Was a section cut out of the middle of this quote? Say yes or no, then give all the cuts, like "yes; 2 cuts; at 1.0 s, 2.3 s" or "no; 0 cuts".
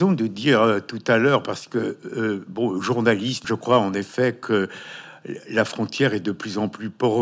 yes; 1 cut; at 3.4 s